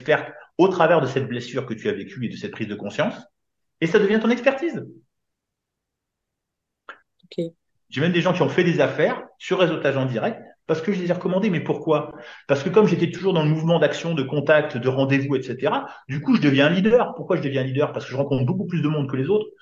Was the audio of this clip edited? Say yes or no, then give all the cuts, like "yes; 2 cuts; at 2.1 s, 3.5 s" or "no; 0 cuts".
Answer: yes; 1 cut; at 7.0 s